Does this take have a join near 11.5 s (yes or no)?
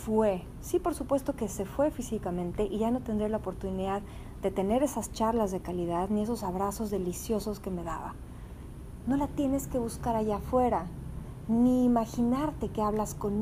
no